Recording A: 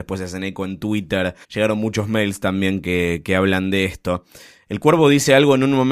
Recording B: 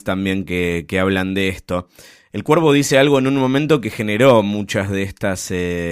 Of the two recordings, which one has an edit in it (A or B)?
A